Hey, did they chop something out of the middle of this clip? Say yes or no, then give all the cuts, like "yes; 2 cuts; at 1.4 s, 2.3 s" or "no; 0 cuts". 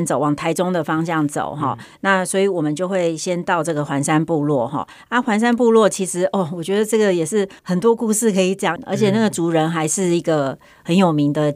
yes; 2 cuts; at 7.6 s, 8.8 s